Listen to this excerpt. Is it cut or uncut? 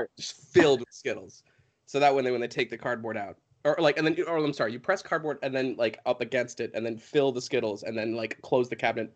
uncut